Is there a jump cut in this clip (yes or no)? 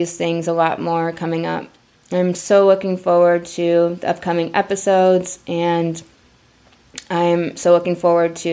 no